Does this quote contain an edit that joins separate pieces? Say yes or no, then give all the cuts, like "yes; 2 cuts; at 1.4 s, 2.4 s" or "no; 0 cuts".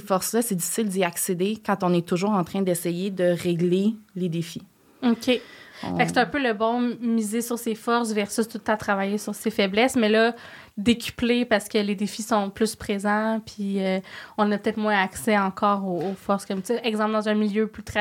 no; 0 cuts